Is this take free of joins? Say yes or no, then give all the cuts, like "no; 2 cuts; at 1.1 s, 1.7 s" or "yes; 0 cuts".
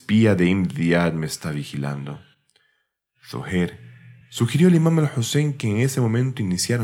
yes; 0 cuts